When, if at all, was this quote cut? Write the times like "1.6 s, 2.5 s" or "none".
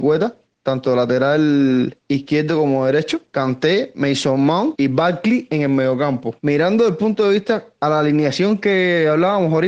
6.4 s